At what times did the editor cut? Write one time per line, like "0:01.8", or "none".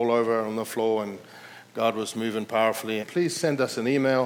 0:03.0